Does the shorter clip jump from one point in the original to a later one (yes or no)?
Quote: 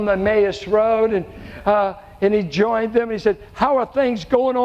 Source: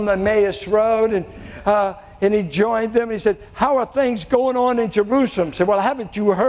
no